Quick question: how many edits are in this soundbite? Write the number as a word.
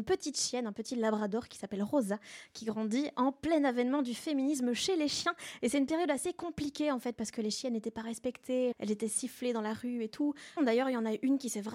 two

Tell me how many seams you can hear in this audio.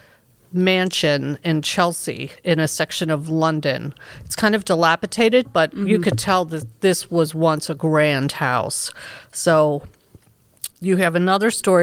two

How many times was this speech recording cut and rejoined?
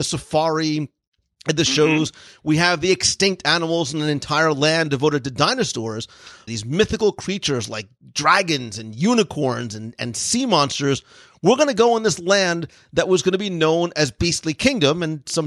one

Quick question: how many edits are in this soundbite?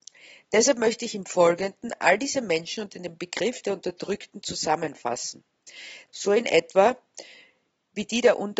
one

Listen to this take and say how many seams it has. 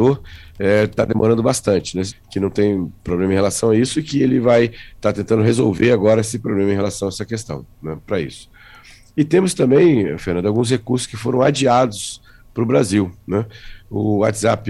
one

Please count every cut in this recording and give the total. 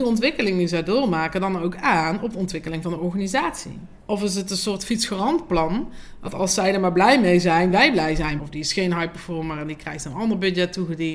two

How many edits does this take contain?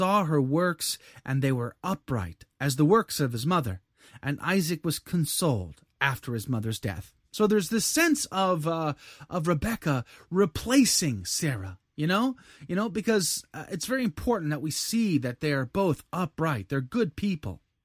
zero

